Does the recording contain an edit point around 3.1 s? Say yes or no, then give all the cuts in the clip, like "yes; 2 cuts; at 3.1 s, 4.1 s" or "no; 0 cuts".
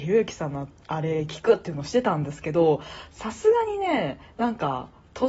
no; 0 cuts